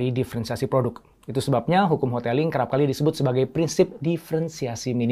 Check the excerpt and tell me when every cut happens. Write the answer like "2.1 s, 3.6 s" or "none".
none